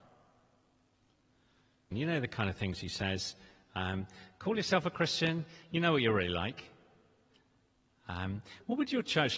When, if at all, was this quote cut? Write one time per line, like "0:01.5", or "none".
0:01.9